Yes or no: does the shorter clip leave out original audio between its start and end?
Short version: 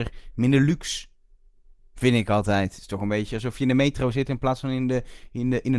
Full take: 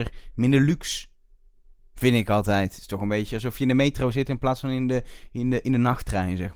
no